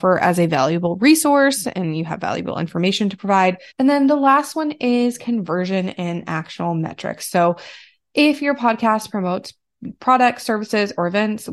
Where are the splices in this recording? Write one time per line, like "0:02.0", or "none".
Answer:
0:03.7